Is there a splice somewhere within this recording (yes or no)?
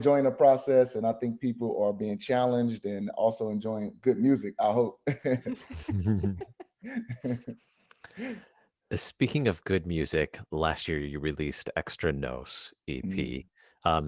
no